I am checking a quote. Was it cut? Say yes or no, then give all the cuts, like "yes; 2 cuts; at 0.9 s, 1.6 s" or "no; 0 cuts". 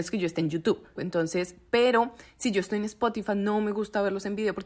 yes; 1 cut; at 1.0 s